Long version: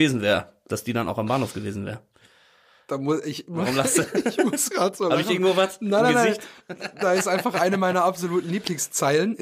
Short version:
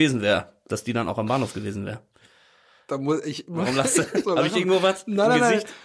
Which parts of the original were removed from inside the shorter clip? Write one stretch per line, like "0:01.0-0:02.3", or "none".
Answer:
0:04.2-0:05.0